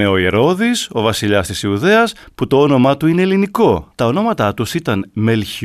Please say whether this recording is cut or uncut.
cut